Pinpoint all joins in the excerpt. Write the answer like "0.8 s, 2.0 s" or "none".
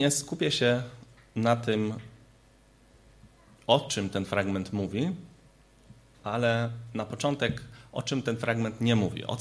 none

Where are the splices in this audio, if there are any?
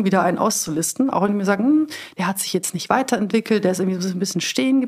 none

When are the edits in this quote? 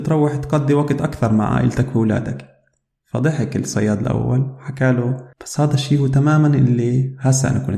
5.3 s

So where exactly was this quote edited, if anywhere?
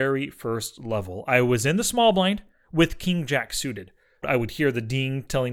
4.2 s

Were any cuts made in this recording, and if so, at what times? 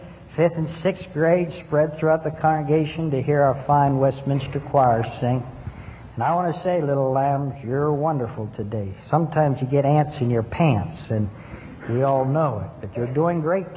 none

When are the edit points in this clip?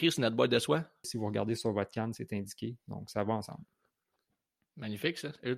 1.0 s

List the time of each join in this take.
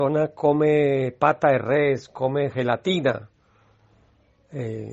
none

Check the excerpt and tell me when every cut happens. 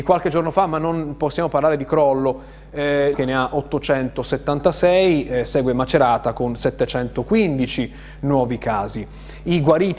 3.1 s

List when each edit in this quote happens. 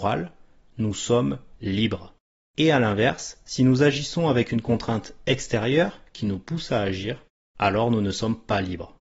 none

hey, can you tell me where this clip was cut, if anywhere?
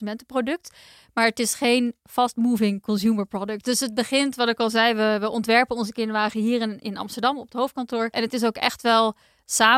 3.6 s, 8.1 s

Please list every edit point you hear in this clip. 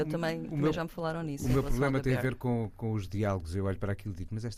none

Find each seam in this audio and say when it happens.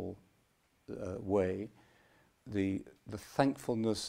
2.3 s

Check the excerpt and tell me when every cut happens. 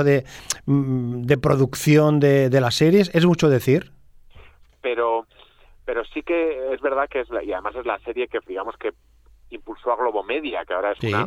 4.6 s, 8.5 s

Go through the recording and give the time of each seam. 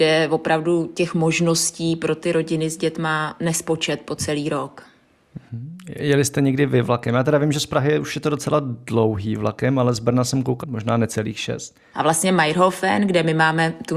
10.6 s, 11.9 s

